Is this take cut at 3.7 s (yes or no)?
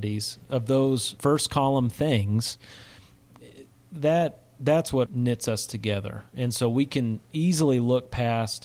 no